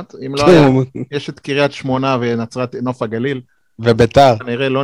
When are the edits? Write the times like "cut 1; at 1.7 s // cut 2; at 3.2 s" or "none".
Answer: none